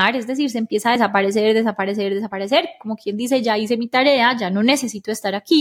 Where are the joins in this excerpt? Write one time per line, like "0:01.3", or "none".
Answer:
none

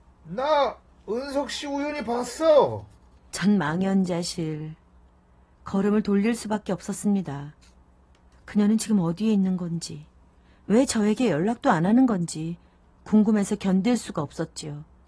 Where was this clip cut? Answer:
0:03.2

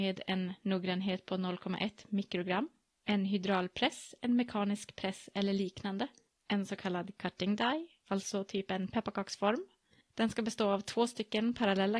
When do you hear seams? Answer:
none

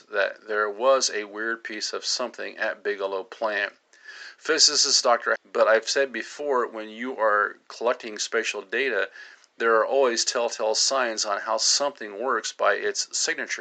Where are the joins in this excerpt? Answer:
0:05.4

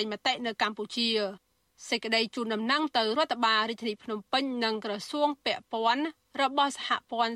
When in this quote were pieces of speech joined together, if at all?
none

